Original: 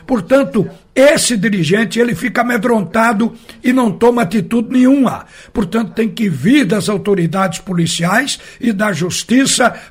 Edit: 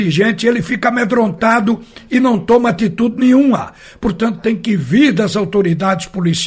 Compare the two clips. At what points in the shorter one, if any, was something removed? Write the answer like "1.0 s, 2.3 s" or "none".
none